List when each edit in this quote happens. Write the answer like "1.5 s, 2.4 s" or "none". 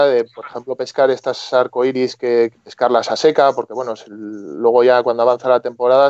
2.5 s

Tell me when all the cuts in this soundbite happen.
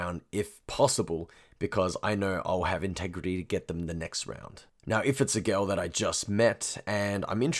none

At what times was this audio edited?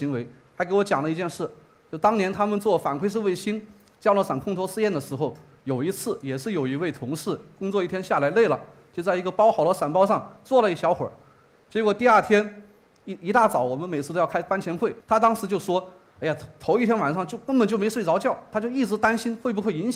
15.0 s, 18.5 s

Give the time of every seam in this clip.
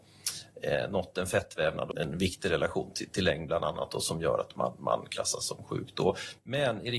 1.9 s

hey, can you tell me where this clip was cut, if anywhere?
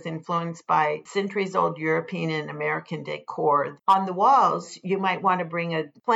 3.8 s

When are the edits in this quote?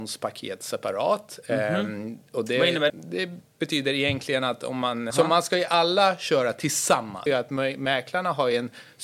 2.9 s, 5.1 s, 7.3 s

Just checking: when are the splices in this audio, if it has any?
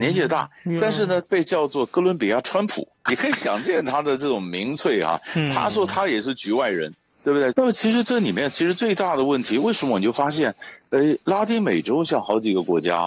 3.1 s, 7.5 s

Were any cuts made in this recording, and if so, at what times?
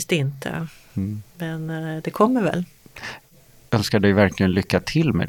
none

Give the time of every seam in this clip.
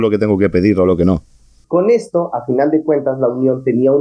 1.6 s

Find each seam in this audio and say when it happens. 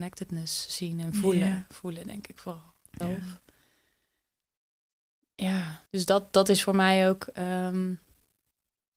3.0 s, 5.9 s

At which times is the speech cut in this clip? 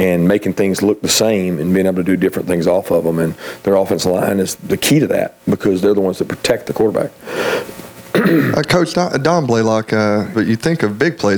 10.3 s

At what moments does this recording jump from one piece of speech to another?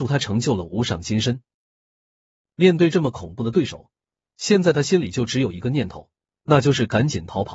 none

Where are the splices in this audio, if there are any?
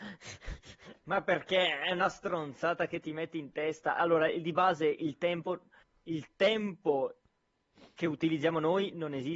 none

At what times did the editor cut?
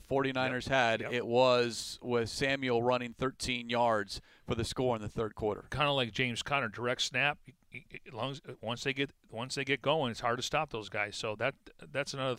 none

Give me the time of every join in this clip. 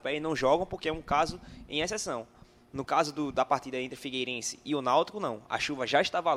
none

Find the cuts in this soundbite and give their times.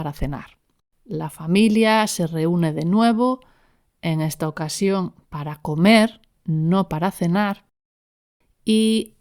0.9 s

